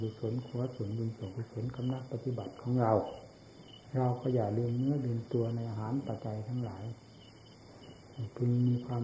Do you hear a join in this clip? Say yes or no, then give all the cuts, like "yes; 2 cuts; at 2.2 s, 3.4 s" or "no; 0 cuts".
yes; 1 cut; at 6.2 s